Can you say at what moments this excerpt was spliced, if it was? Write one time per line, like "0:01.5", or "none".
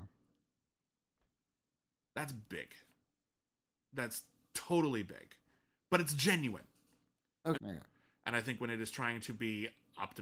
0:07.5